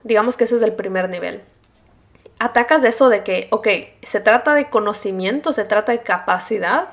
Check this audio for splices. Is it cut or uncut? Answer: uncut